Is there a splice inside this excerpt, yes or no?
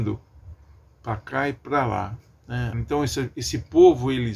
yes